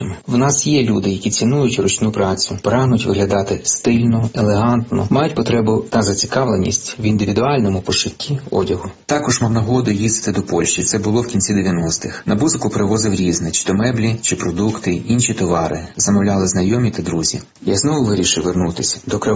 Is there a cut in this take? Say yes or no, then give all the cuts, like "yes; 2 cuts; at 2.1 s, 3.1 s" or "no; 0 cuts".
no; 0 cuts